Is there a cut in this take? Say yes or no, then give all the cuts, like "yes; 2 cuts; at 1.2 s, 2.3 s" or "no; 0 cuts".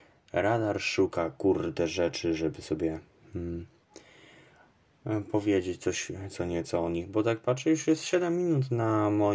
no; 0 cuts